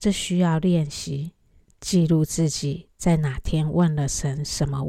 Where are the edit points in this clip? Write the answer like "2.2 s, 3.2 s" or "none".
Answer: 1.7 s